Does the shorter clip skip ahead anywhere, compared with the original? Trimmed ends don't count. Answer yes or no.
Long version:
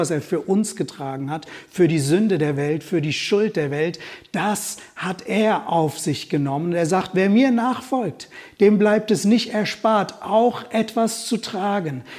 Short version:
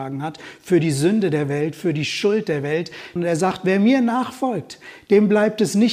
yes